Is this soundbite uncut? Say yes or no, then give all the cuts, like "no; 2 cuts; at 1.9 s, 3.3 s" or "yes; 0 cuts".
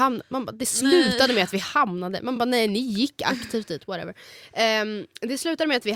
yes; 0 cuts